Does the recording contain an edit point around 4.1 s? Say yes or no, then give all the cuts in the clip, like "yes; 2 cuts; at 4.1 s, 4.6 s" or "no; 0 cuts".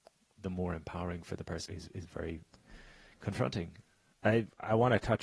yes; 2 cuts; at 1.7 s, 4.1 s